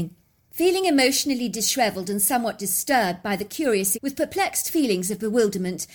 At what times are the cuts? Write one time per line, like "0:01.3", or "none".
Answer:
0:03.9